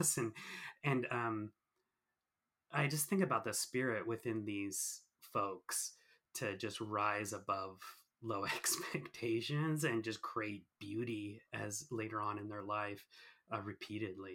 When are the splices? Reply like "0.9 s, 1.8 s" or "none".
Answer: 11.5 s